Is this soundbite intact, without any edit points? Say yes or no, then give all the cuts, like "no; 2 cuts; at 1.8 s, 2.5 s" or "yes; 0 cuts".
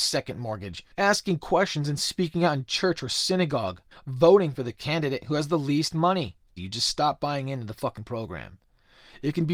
no; 3 cuts; at 0.9 s, 3.9 s, 6.6 s